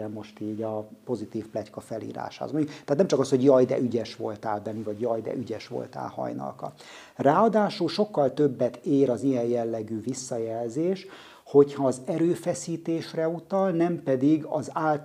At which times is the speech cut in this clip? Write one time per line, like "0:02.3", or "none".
none